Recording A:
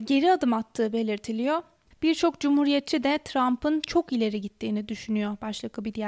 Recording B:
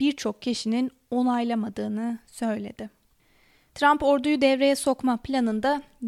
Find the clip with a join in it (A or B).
A